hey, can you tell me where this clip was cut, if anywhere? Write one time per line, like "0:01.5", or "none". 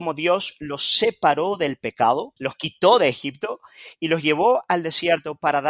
0:02.4